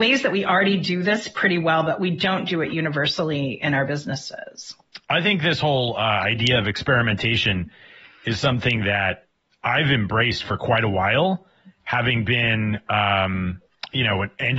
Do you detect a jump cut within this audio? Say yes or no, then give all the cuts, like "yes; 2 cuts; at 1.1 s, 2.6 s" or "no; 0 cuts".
yes; 1 cut; at 5.0 s